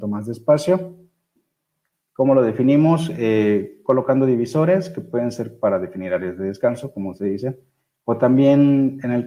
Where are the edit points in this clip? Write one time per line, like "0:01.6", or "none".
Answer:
0:01.9